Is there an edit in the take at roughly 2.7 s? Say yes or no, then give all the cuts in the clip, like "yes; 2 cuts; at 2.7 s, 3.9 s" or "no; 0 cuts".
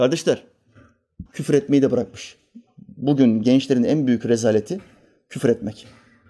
no; 1 cut; at 1.3 s